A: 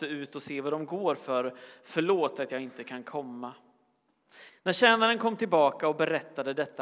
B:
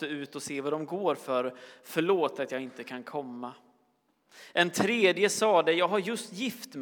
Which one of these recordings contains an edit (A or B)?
A